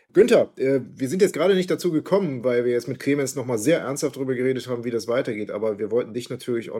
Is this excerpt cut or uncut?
uncut